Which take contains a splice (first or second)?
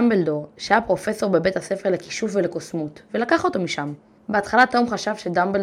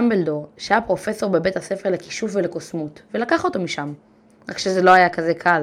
first